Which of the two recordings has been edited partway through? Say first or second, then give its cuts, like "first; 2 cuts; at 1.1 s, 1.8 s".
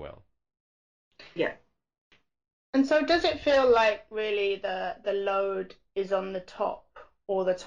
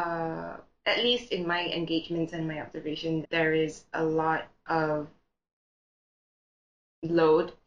second; 1 cut; at 3.2 s